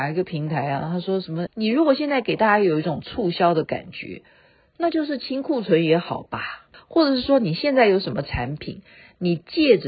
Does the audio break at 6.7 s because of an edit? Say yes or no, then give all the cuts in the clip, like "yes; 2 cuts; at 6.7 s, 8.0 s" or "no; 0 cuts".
yes; 2 cuts; at 1.5 s, 6.7 s